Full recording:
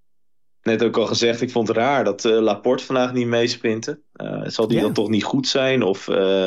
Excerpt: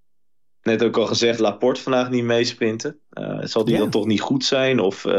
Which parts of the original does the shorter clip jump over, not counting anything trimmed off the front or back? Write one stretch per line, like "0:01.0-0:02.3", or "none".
0:01.4-0:02.4